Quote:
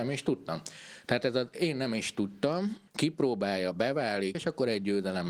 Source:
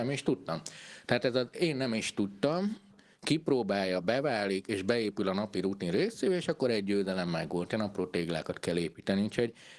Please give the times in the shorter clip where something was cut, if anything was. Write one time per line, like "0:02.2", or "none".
0:02.9
0:04.3